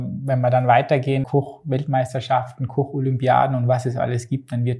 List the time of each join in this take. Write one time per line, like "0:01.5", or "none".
0:01.2